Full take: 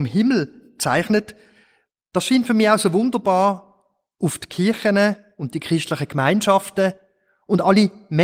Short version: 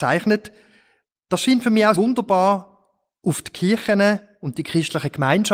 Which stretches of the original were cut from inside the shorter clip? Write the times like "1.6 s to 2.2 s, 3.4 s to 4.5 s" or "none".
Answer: 2.8 s to 2.9 s